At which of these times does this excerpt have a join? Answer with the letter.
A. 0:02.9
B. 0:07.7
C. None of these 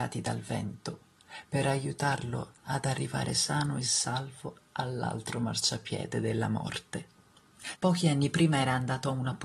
B